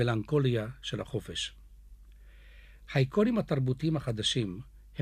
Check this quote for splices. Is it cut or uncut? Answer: uncut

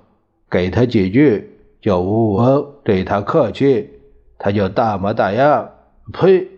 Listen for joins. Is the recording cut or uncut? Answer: cut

